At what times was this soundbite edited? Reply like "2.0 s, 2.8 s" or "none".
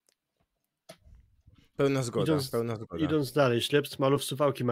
none

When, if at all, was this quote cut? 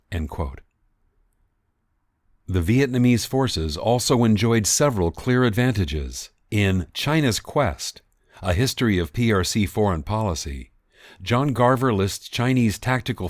6.5 s

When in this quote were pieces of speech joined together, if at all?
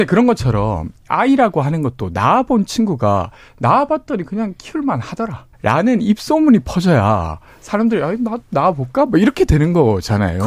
5.5 s

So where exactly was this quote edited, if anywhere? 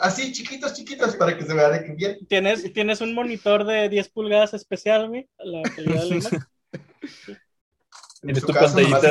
5.4 s

